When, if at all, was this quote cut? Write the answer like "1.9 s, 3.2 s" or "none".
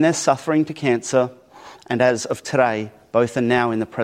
none